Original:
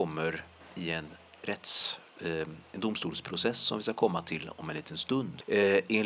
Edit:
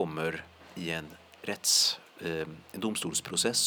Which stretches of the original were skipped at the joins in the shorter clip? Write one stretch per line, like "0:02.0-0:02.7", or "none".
none